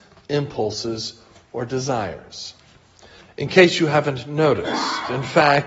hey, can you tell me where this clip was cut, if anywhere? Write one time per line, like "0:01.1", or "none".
0:03.2